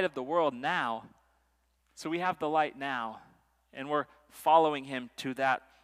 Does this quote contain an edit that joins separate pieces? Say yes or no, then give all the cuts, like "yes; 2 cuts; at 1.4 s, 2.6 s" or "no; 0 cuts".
yes; 1 cut; at 1.8 s